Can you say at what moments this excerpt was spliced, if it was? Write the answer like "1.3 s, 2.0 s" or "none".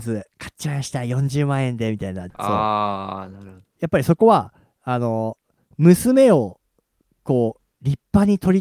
2.3 s